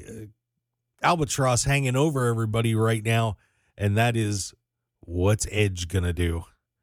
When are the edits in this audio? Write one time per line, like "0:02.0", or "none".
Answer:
none